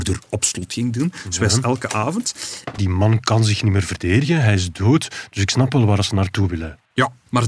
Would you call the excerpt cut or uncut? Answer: cut